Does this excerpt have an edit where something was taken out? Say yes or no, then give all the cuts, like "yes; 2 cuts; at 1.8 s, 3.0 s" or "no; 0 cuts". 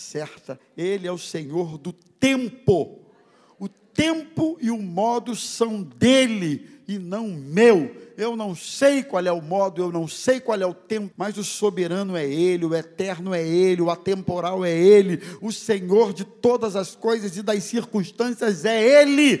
yes; 1 cut; at 11.1 s